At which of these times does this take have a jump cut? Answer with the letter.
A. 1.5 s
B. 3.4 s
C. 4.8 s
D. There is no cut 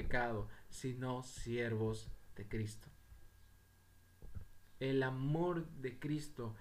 C